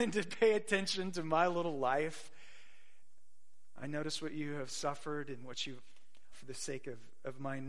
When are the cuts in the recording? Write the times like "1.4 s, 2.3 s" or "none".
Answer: 3.8 s, 6.3 s